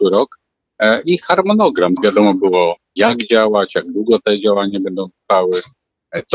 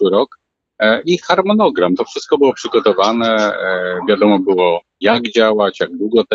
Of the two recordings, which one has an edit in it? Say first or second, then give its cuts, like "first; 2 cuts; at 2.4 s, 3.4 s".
first; 1 cut; at 2.0 s